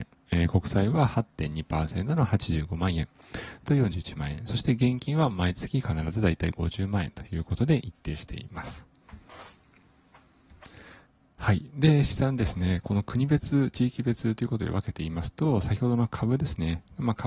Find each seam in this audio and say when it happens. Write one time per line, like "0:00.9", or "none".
0:03.7